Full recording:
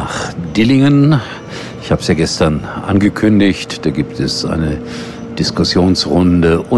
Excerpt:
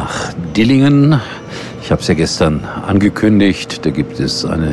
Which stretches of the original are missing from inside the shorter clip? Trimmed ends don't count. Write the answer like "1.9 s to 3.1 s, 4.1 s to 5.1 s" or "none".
none

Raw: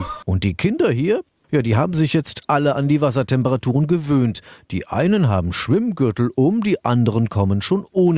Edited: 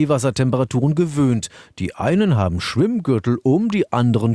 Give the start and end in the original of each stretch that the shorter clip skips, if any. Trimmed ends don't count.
none

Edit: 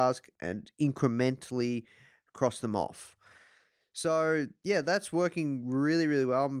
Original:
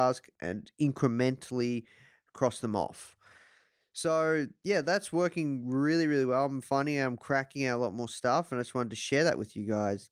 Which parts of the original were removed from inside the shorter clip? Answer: none

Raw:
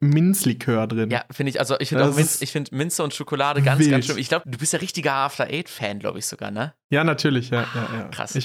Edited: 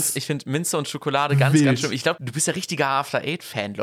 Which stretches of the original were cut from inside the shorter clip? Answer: none

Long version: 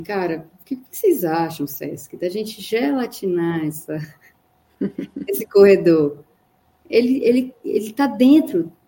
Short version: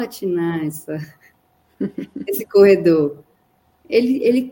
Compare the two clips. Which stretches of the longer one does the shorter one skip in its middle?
none

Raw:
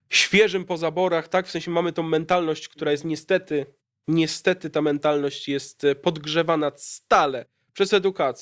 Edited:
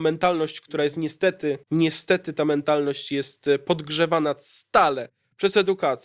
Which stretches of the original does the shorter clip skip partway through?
3.7 s to 4.0 s

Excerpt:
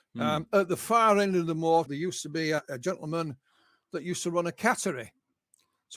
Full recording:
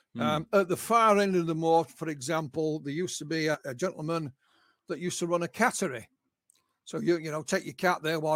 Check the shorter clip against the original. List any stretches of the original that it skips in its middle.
1.9 s to 2.8 s

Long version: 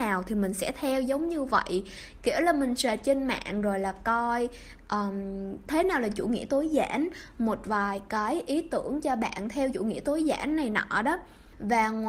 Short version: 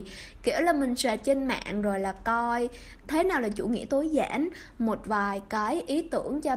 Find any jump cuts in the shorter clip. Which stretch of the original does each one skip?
4.8 s to 5.6 s

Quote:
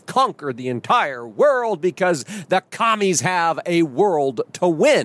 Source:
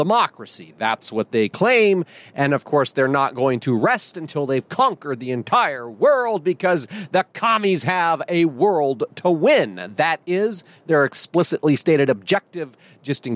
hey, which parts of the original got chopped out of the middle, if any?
none

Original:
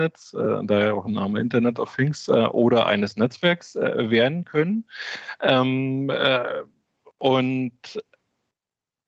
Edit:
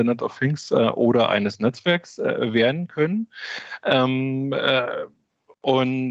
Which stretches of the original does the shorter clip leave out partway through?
none

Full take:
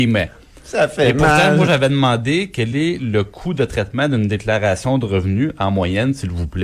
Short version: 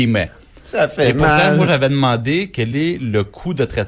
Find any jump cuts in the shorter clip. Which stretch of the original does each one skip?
none

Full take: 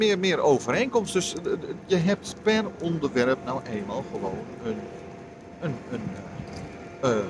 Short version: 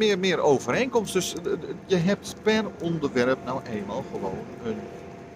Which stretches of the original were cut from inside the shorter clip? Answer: none

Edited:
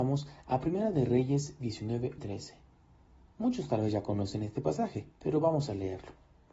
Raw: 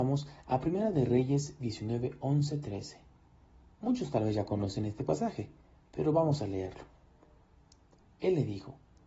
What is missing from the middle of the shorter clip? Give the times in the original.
2.2 s to 2.6 s, 5.5 s to 5.8 s

